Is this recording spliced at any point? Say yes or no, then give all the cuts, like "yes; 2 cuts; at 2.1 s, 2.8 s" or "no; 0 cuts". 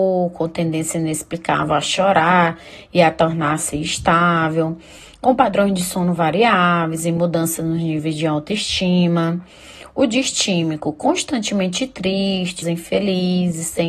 yes; 1 cut; at 12.6 s